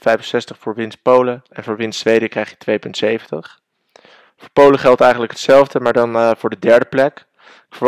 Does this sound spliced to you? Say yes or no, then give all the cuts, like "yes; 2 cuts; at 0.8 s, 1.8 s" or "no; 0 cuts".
yes; 2 cuts; at 1.5 s, 4.3 s